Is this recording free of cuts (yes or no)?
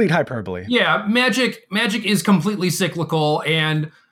yes